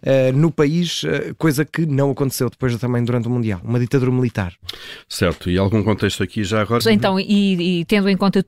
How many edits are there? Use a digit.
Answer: 2